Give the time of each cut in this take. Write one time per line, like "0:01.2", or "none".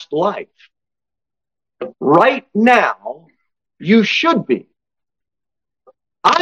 none